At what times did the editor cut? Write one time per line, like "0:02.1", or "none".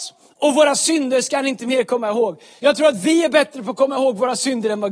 0:02.6